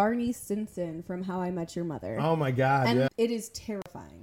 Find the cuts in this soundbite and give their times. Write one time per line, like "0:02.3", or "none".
0:03.1